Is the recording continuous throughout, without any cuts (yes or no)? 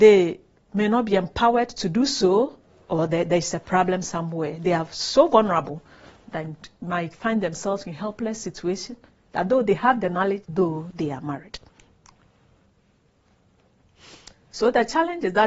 no